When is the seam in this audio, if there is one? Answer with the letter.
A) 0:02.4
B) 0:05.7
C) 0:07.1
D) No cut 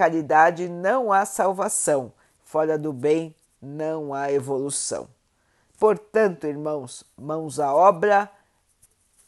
A